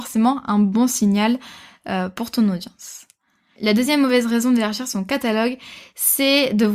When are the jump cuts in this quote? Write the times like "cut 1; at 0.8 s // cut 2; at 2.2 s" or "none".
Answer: none